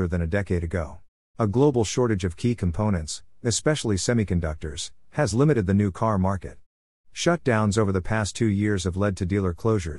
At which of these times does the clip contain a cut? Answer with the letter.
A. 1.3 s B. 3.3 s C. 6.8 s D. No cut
A